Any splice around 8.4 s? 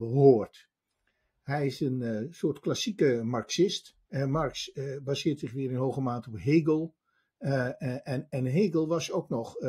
no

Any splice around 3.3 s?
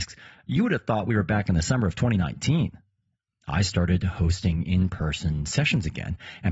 yes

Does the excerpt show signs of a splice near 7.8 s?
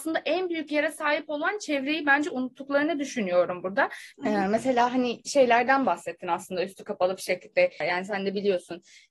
yes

